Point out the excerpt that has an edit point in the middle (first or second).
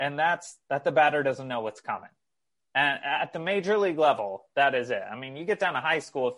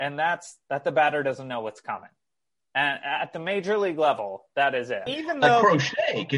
second